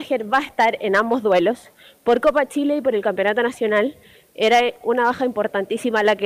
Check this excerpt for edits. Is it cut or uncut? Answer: uncut